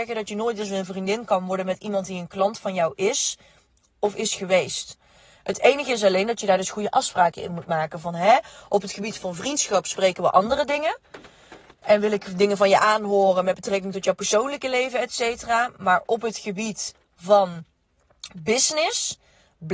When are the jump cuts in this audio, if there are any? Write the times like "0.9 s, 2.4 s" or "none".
none